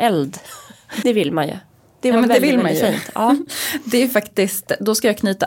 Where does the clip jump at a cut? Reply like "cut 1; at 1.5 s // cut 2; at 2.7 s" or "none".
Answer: cut 1; at 1.0 s